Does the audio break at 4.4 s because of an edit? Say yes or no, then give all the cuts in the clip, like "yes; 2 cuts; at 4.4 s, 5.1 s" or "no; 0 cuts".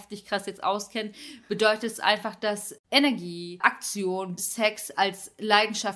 yes; 2 cuts; at 2.8 s, 4.4 s